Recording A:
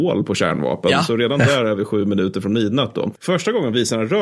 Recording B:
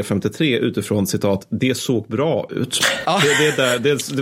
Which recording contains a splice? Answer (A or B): B